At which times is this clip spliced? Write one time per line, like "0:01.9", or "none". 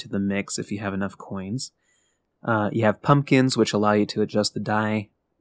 0:02.3